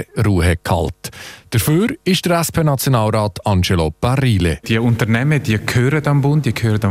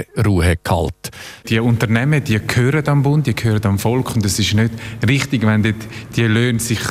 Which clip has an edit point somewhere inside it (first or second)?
second